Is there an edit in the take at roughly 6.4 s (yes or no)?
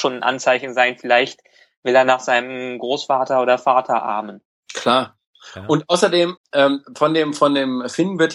yes